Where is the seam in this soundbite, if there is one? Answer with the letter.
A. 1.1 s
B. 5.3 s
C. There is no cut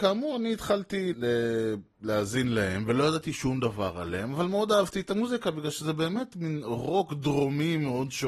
A